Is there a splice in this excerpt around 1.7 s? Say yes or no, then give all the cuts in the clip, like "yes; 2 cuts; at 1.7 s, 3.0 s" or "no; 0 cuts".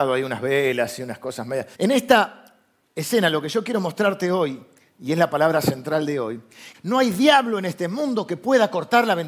yes; 2 cuts; at 1.7 s, 6.7 s